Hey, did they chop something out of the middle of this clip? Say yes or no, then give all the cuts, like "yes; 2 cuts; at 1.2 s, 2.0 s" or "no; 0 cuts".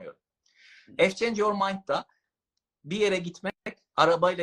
no; 0 cuts